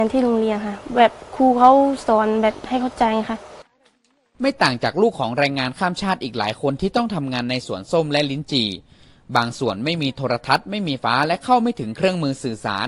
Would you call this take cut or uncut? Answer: cut